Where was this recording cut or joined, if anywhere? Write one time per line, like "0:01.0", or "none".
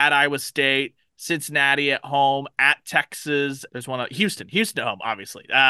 0:01.1
0:03.7